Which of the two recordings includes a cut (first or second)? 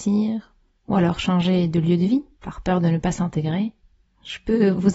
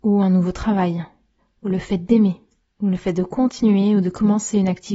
first